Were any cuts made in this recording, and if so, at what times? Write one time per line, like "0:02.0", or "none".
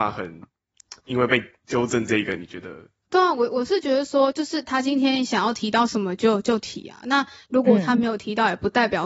none